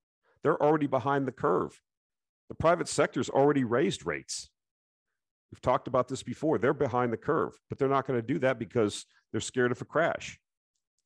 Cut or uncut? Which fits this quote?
uncut